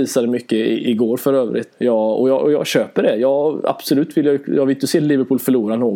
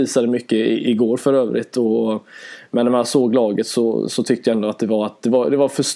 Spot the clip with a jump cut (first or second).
first